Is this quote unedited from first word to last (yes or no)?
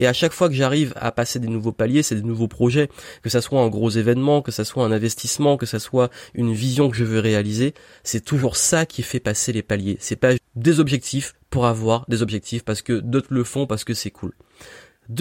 no